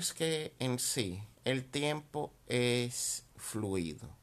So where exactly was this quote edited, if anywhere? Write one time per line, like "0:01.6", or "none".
0:01.4